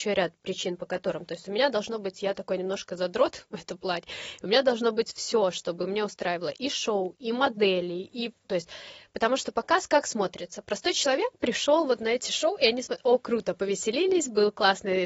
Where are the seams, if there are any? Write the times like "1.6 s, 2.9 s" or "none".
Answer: 8.4 s